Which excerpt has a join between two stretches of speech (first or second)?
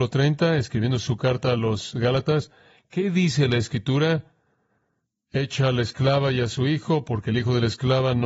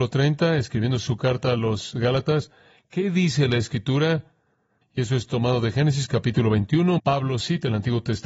second